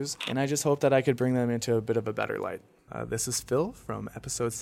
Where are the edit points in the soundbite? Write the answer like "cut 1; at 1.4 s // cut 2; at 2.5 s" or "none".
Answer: cut 1; at 2.9 s